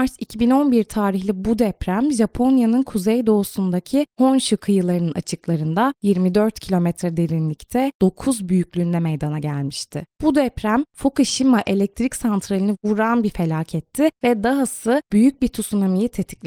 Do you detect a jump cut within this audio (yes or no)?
no